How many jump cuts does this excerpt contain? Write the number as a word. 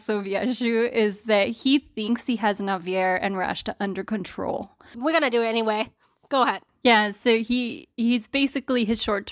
one